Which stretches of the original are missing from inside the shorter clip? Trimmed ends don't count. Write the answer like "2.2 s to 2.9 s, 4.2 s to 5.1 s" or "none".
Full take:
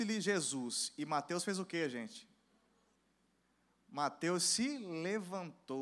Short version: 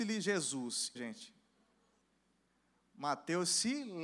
1.0 s to 1.9 s